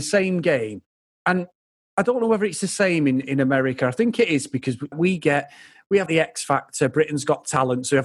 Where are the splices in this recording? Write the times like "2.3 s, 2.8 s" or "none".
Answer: 4.9 s, 6.1 s